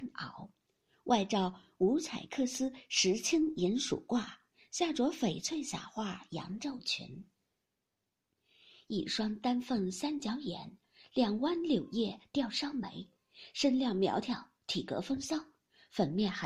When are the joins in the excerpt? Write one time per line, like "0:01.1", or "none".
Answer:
none

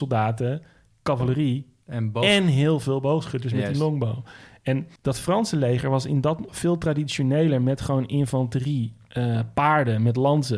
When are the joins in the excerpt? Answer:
0:05.0
0:06.5

